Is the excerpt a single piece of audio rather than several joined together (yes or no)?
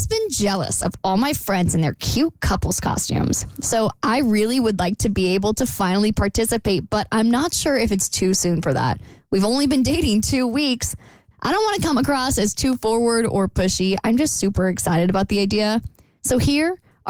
no